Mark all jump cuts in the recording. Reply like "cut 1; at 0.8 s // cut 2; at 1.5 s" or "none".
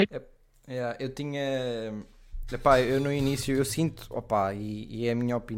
none